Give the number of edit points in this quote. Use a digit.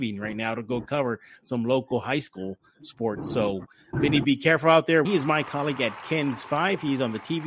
2